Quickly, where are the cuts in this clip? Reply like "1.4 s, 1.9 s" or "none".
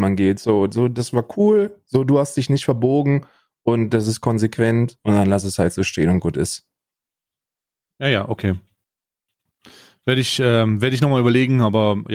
none